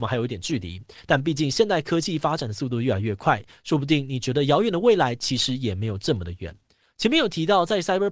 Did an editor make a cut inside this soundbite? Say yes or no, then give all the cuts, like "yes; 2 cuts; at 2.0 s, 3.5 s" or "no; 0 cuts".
yes; 1 cut; at 6.8 s